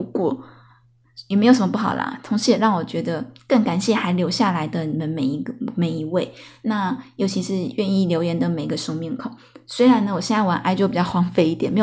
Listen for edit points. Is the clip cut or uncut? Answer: uncut